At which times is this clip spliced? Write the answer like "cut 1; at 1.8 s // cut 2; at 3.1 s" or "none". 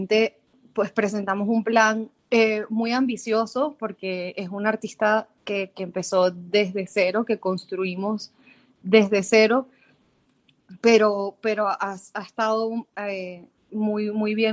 cut 1; at 2.2 s